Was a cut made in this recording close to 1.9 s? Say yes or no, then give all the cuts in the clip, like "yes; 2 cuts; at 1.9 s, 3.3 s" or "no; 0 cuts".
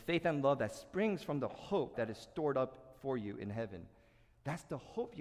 yes; 1 cut; at 1.9 s